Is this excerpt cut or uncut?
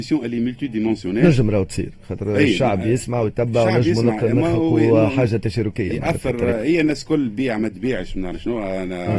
uncut